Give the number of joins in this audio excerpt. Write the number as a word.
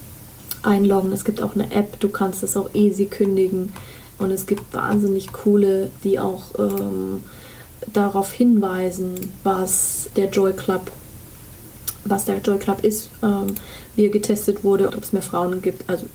three